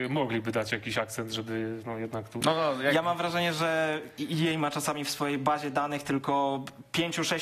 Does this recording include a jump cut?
no; 0 cuts

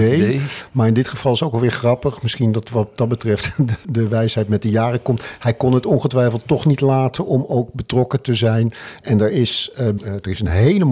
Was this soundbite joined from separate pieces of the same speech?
yes; 2 cuts; at 3.8 s, 10.0 s

